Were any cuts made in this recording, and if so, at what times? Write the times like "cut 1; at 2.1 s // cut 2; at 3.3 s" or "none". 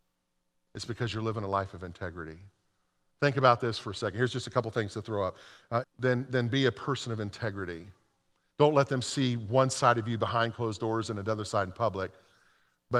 cut 1; at 5.8 s // cut 2; at 8.5 s